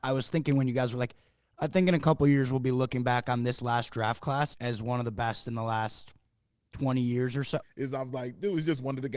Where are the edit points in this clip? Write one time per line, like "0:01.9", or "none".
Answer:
0:04.5
0:07.6